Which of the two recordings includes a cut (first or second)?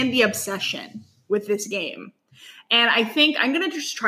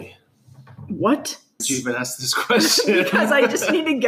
second